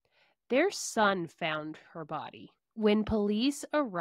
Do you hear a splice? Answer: yes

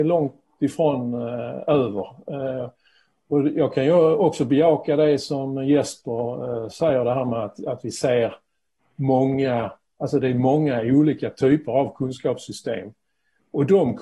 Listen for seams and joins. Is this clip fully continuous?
yes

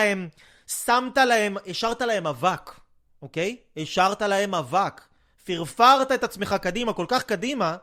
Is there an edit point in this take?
no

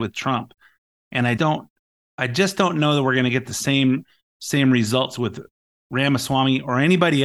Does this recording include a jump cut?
yes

